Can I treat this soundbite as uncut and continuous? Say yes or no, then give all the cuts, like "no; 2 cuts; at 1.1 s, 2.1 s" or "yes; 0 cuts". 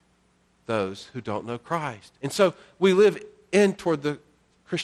yes; 0 cuts